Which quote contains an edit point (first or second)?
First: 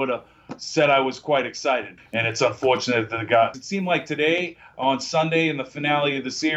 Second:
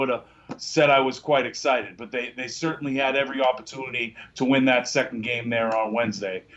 first